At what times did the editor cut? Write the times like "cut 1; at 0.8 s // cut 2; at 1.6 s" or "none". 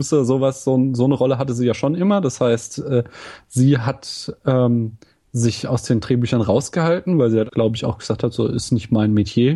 cut 1; at 7.5 s